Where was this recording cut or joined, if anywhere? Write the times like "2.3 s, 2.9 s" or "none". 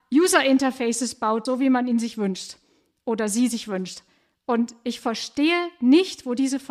1.5 s